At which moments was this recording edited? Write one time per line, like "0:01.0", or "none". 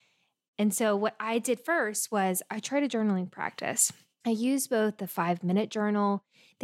none